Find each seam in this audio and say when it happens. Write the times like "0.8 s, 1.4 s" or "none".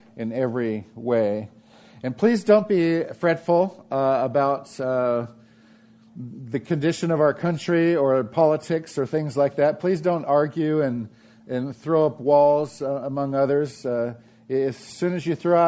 none